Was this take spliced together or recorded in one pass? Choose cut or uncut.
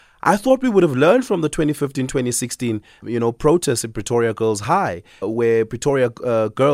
cut